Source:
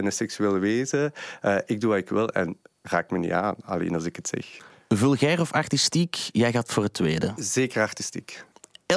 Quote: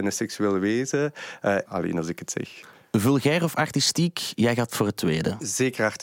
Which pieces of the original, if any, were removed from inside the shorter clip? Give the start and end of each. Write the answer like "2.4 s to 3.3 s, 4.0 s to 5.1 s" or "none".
1.6 s to 3.6 s